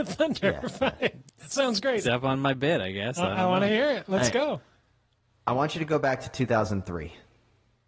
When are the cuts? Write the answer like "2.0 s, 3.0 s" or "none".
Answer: 2.0 s